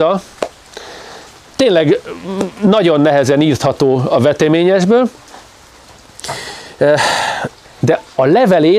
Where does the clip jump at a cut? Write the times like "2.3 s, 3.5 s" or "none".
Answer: 1.5 s, 7.7 s